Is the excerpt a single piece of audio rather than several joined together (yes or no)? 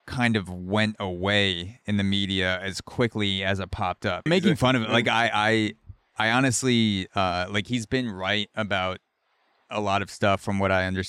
no